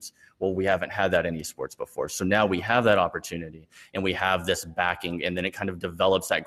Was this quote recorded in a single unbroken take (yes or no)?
yes